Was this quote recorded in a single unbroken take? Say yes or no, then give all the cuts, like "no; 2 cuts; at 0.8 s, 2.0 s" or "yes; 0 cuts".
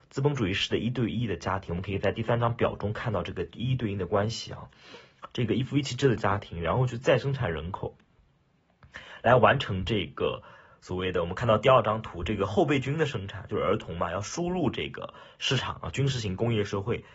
yes; 0 cuts